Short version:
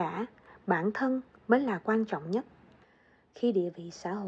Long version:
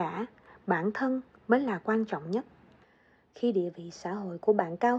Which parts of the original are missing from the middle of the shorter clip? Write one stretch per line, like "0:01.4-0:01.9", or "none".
none